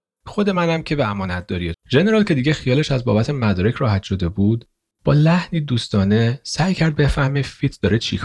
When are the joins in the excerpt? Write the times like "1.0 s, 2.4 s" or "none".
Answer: 1.7 s